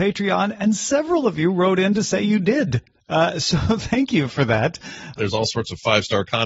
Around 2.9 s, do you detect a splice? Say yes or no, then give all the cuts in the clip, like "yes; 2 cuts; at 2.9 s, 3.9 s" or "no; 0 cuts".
no; 1 cut; at 5.2 s